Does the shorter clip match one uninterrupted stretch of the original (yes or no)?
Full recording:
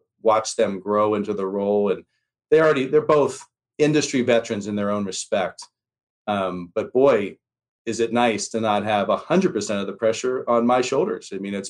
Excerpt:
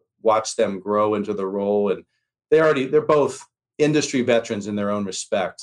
yes